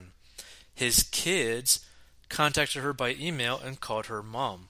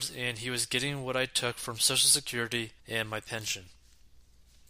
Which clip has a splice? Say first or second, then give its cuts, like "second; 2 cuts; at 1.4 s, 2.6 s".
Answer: second; 1 cut; at 2.8 s